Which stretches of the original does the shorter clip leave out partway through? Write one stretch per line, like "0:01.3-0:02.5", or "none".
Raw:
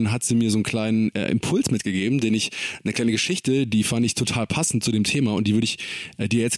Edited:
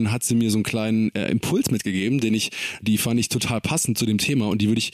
0:02.8-0:03.7